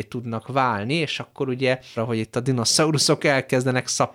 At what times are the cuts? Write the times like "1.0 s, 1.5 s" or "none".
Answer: 2.0 s

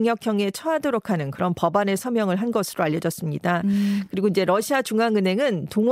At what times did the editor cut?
none

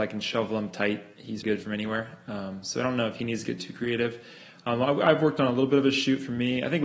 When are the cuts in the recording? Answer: 1.4 s

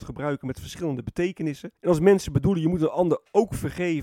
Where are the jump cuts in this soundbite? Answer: 1.8 s

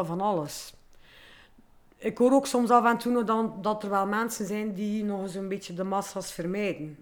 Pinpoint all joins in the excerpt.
none

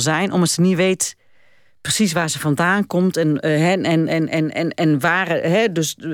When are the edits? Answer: none

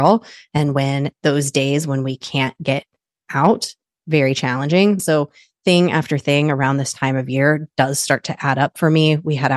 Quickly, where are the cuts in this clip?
5.0 s

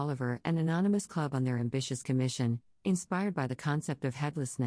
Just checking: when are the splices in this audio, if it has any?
none

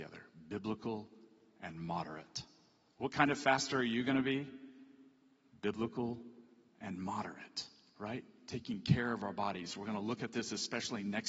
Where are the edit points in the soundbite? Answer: none

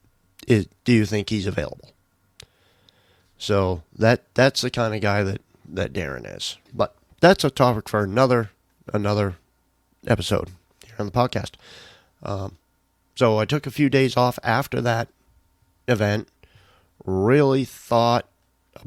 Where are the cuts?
6.7 s

